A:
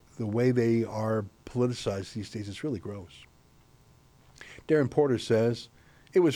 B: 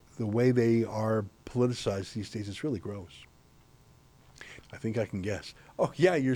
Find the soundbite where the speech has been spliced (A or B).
B